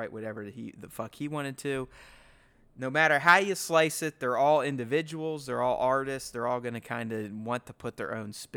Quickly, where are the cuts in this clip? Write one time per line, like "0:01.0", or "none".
none